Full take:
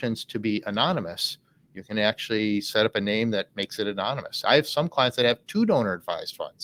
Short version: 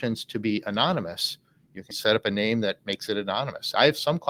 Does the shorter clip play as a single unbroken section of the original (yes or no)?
no